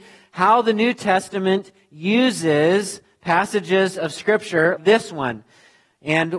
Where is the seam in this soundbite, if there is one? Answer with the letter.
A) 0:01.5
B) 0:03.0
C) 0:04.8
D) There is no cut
C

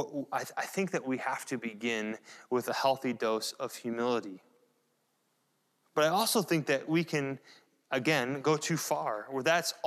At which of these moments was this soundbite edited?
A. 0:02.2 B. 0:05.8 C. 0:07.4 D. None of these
B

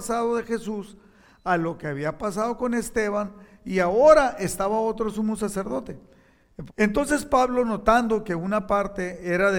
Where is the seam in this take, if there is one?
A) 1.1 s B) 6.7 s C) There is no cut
B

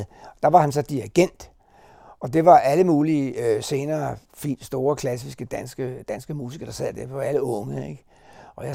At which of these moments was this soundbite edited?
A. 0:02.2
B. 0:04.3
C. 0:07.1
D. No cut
B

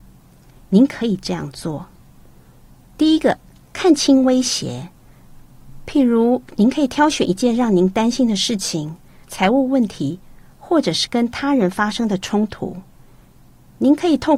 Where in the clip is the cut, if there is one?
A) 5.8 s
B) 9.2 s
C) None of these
B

